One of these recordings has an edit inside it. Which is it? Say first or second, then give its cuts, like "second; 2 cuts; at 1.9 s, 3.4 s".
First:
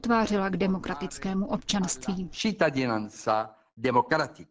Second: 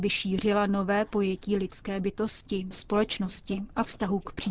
second; 1 cut; at 2.7 s